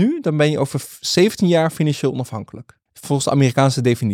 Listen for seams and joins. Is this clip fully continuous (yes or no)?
no